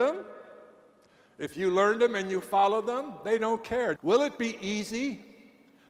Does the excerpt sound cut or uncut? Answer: cut